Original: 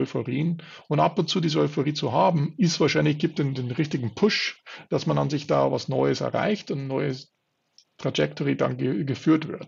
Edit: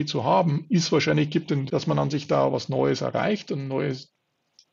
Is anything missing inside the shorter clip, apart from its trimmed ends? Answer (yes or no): yes